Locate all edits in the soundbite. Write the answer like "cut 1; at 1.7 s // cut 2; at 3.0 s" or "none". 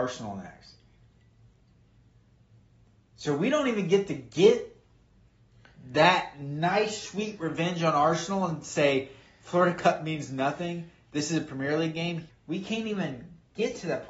cut 1; at 12.3 s